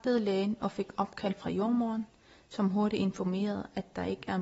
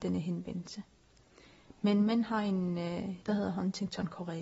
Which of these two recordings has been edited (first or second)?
second